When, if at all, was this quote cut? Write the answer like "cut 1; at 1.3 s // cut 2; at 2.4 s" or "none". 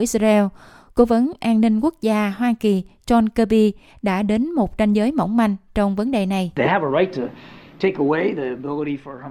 none